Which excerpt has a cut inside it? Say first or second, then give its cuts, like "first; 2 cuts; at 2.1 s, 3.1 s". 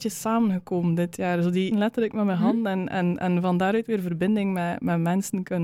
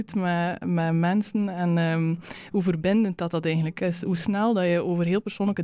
first; 1 cut; at 1.7 s